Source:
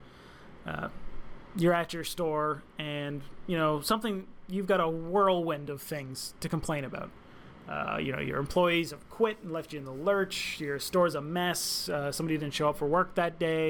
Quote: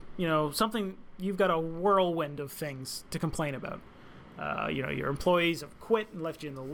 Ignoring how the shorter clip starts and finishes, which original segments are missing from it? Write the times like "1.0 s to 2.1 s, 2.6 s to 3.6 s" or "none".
none